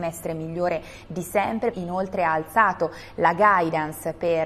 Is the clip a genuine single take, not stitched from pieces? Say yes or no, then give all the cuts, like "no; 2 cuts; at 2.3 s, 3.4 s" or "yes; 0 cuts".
no; 1 cut; at 1.7 s